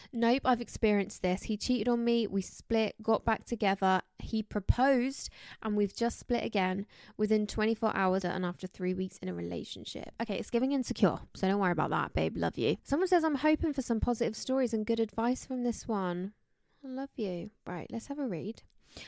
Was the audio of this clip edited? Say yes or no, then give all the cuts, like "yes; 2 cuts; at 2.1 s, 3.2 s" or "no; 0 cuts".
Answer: yes; 2 cuts; at 8.2 s, 12.8 s